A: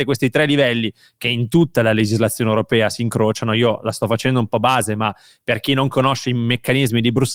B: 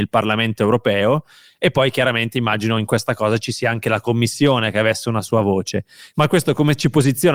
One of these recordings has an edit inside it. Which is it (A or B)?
B